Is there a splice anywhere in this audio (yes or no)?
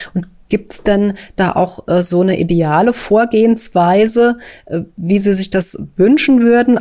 no